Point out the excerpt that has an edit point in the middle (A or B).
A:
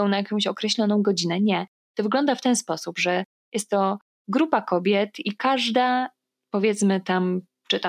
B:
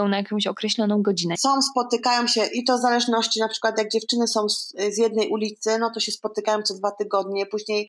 B